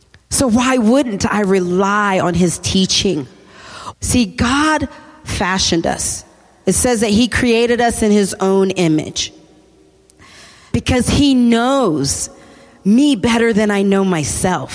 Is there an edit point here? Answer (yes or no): yes